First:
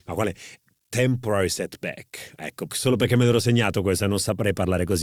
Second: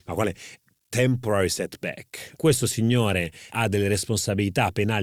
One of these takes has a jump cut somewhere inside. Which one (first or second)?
second